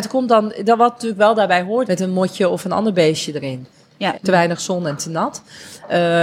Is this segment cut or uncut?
cut